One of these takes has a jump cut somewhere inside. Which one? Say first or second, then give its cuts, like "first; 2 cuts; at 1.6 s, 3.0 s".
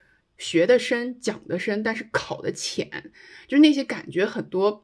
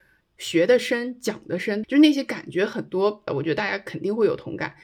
second; 2 cuts; at 1.8 s, 3.3 s